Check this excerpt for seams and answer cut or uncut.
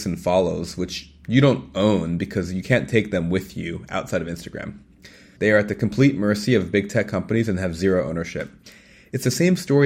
cut